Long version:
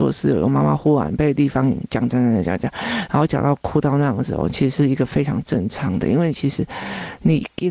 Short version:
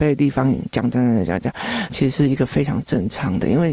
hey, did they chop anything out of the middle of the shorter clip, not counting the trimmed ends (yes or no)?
yes